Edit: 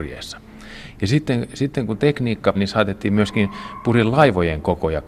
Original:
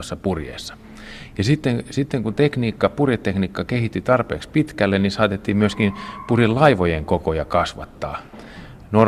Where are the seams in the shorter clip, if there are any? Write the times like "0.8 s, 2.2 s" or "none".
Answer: 2.5 s